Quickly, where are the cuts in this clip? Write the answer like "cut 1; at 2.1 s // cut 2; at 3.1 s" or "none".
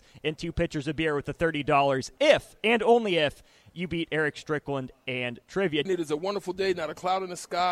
cut 1; at 5.9 s